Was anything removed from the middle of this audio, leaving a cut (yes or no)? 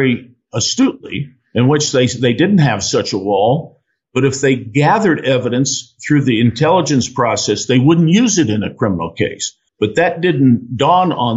yes